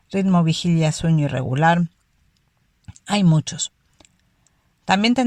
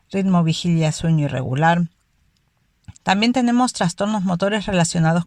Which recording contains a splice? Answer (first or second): second